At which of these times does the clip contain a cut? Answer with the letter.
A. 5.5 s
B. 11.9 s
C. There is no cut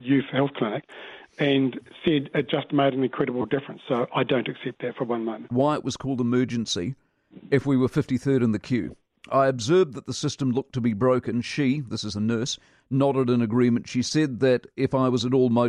A